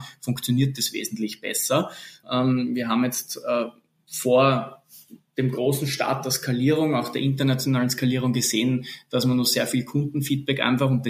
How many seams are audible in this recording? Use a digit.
1